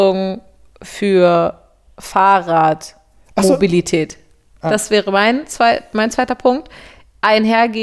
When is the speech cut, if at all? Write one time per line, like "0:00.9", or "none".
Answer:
none